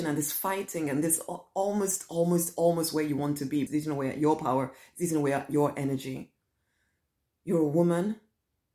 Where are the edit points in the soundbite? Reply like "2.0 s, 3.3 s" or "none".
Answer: 3.7 s